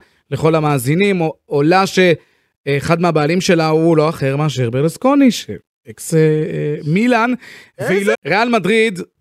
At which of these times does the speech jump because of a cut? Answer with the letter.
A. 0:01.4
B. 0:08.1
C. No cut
B